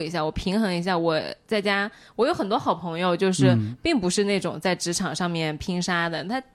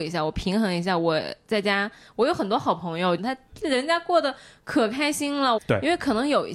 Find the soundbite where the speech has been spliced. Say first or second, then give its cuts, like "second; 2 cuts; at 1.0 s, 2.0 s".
second; 2 cuts; at 3.2 s, 5.6 s